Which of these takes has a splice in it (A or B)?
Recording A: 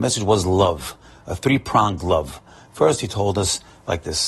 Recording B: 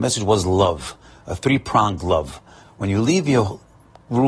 B